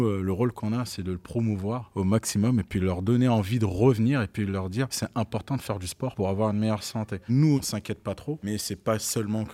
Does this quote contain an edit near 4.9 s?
yes; 2 cuts; at 4.9 s, 7.6 s

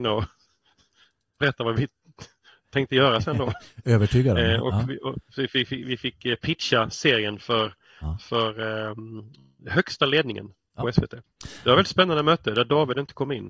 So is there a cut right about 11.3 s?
yes; 1 cut; at 11.3 s

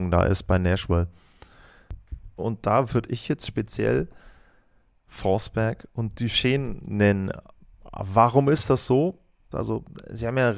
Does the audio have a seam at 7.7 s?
no; 2 cuts; at 2.4 s, 9.5 s

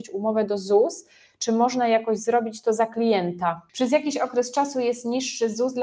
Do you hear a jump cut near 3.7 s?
yes; 1 cut; at 3.7 s

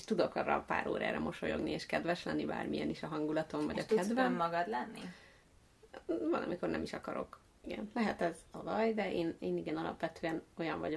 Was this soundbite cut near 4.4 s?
no; 1 cut; at 7.6 s

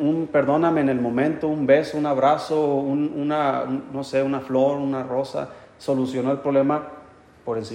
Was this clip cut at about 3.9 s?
no; 0 cuts

